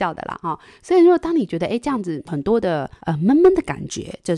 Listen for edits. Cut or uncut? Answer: uncut